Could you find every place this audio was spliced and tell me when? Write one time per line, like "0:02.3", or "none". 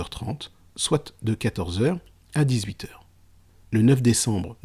0:03.6